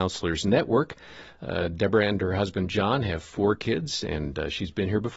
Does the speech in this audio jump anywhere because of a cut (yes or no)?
no